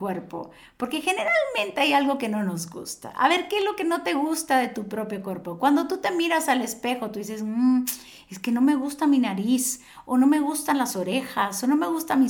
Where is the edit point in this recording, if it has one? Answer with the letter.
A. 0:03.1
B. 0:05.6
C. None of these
C